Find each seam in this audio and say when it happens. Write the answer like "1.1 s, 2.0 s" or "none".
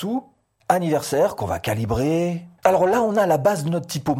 2.6 s